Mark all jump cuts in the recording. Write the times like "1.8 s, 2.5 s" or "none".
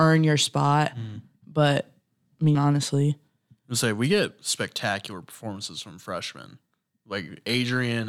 2.5 s